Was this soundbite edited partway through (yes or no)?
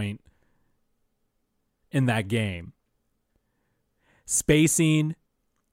no